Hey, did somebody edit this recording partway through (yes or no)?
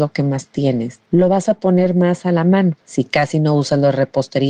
yes